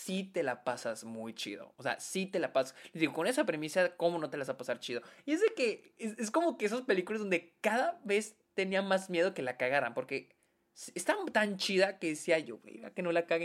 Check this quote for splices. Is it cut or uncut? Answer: uncut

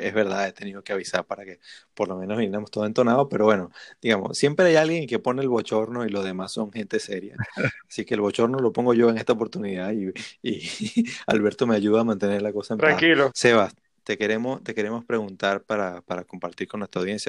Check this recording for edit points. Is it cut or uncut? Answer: cut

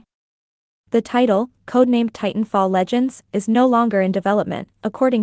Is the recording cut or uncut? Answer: uncut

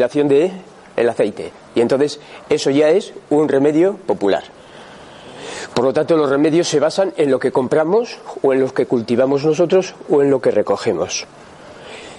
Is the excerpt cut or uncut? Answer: uncut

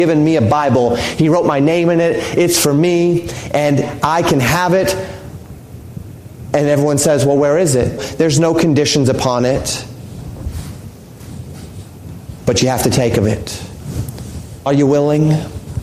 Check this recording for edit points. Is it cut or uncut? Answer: cut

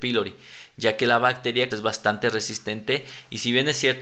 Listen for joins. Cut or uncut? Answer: cut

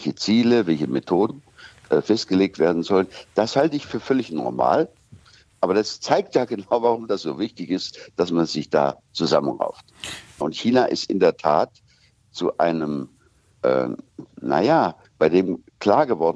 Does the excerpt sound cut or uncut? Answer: cut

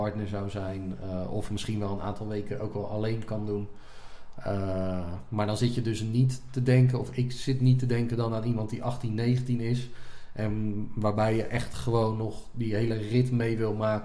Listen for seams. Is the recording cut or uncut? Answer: uncut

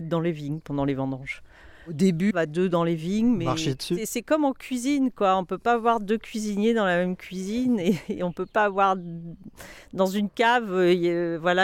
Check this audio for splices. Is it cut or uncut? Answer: cut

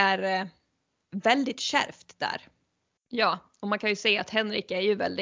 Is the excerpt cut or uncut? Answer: cut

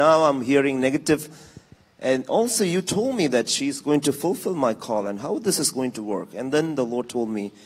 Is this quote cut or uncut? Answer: uncut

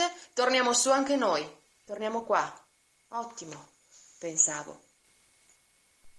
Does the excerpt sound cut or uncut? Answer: cut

